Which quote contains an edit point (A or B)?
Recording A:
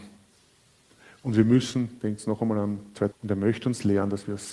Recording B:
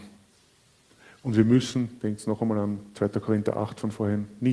A